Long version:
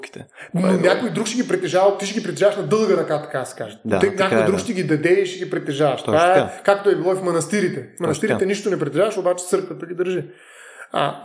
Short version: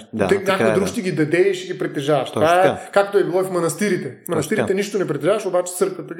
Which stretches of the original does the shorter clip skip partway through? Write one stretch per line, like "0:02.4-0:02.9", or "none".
none